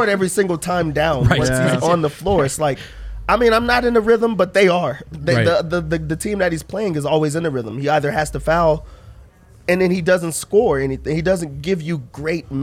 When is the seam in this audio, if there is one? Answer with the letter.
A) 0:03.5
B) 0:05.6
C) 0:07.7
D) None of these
D